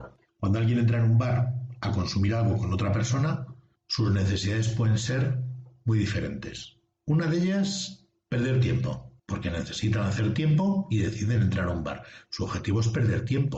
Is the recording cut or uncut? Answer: cut